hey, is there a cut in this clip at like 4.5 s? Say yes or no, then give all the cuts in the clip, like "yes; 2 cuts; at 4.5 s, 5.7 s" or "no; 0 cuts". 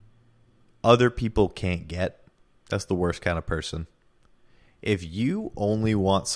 no; 1 cut; at 2.5 s